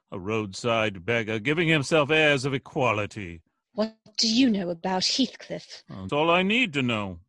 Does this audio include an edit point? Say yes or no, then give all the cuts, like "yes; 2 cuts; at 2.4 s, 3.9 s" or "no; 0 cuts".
yes; 1 cut; at 6.1 s